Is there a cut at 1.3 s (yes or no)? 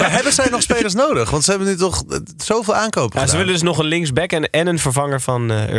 no